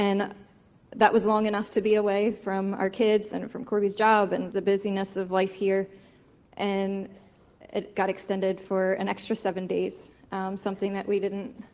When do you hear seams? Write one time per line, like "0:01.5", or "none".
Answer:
0:04.5

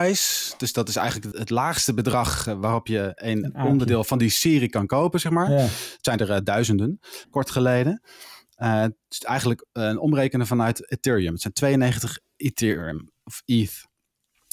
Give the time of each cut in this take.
0:01.3
0:07.2

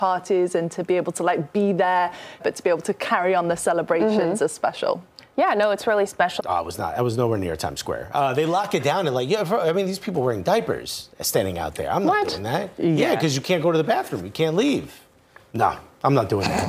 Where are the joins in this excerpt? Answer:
0:02.4
0:06.4

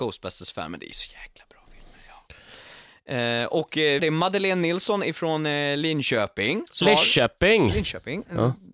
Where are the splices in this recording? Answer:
0:04.0

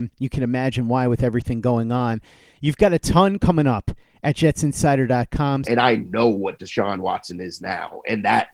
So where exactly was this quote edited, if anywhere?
0:05.6

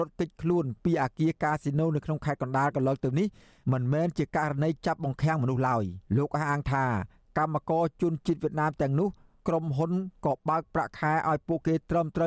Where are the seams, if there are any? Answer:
0:06.1

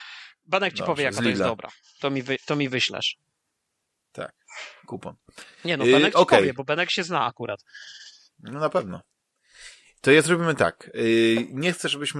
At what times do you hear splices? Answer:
none

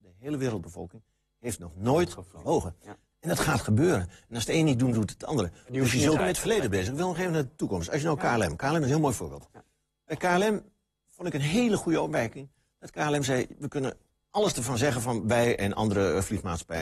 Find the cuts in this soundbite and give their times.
0:03.1
0:06.2

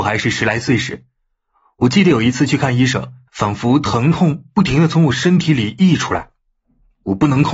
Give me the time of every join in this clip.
0:03.3

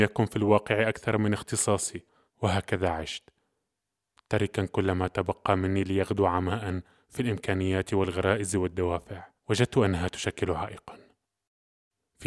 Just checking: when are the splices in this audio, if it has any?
0:02.3
0:09.4

